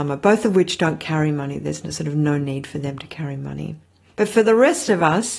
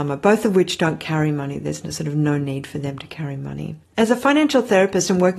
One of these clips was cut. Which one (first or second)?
second